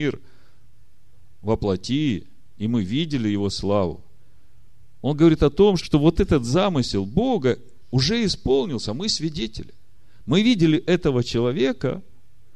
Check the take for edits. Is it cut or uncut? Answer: cut